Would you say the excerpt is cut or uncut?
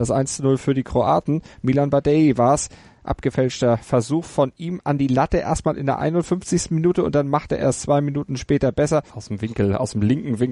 cut